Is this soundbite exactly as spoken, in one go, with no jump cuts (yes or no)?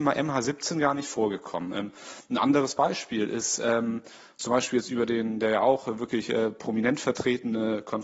yes